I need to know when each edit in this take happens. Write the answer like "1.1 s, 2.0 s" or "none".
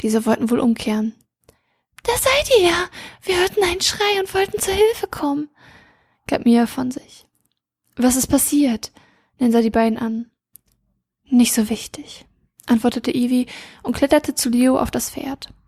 none